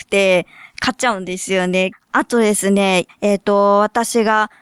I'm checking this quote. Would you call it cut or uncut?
cut